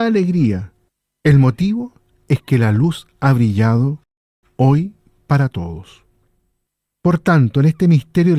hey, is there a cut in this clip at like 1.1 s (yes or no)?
no